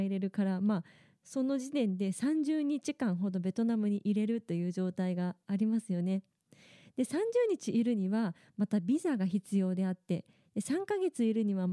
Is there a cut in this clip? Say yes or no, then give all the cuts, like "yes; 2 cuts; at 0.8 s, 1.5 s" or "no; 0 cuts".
no; 0 cuts